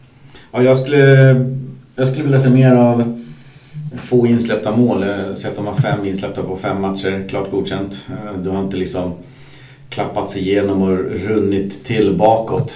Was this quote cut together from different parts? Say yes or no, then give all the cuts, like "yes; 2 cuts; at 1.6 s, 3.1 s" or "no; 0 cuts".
no; 0 cuts